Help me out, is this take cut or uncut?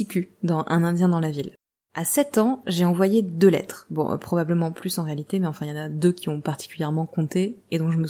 cut